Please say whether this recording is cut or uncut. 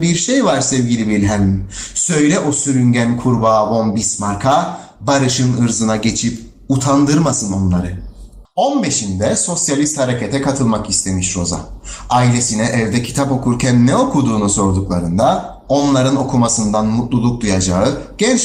uncut